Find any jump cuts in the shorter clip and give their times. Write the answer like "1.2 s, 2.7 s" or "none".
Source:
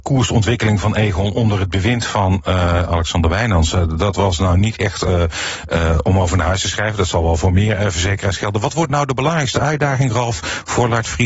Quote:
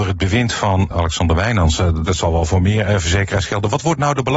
0.9 s, 2.0 s